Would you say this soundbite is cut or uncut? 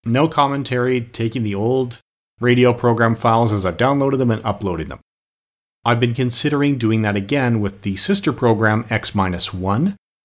uncut